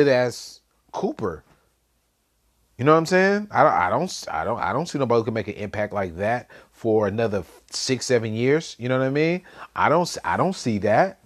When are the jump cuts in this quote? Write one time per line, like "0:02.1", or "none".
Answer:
none